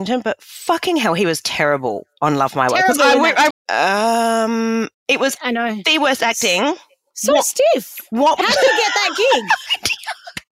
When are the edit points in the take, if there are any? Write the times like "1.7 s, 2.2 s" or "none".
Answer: 3.5 s